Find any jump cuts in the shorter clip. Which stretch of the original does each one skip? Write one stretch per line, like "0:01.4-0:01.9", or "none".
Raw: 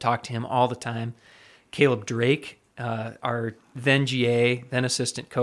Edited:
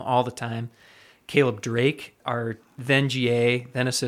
0:02.6-0:03.2